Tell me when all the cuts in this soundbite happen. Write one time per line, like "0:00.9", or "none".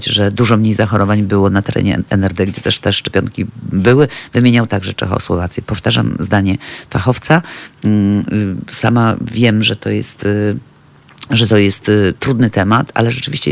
none